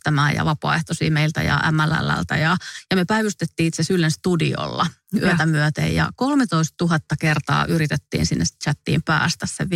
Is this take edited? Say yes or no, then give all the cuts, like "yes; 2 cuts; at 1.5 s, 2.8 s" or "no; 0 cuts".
no; 0 cuts